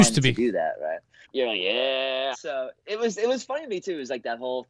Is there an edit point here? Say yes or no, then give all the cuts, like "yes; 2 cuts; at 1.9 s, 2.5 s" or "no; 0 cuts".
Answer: yes; 2 cuts; at 1.2 s, 2.3 s